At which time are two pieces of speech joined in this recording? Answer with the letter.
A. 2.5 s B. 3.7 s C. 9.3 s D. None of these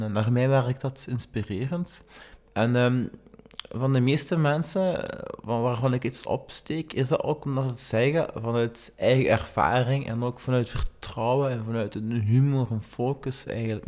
A